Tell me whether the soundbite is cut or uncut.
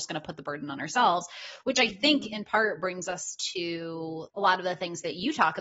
cut